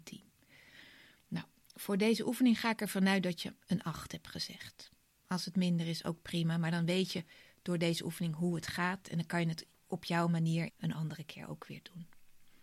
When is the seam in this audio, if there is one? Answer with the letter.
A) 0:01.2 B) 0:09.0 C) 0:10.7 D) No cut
C